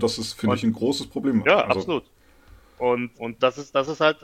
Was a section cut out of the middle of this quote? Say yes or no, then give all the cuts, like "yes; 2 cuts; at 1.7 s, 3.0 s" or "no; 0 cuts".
yes; 1 cut; at 3.1 s